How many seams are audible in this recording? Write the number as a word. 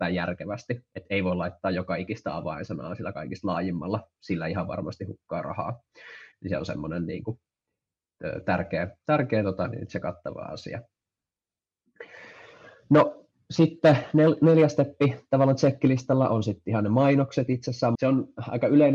one